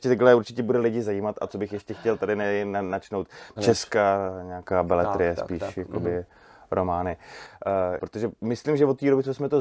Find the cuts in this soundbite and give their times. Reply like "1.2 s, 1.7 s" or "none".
3.6 s, 8.0 s